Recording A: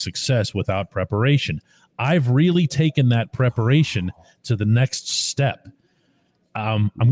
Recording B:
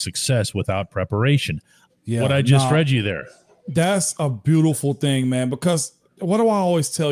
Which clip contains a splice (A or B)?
B